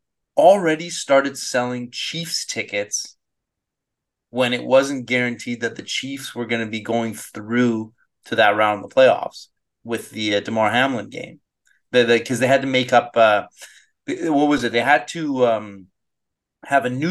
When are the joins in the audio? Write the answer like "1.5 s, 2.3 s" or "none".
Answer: none